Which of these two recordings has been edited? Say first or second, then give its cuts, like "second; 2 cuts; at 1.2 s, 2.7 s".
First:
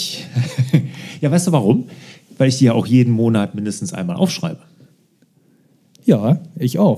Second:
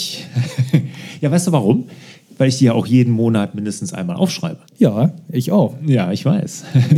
second; 1 cut; at 4.7 s